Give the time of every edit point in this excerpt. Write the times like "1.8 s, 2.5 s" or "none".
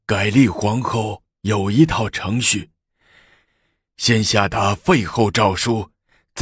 3.4 s